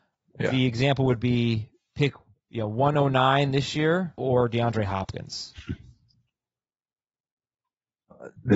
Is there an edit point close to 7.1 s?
no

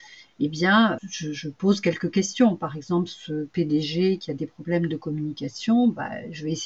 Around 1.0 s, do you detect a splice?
yes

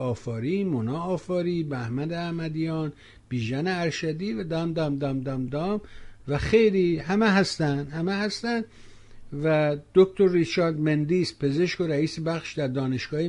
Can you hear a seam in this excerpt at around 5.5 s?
yes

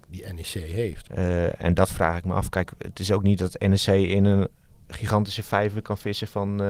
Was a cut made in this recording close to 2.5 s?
no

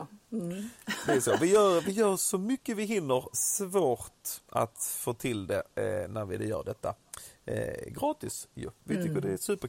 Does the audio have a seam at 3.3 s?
yes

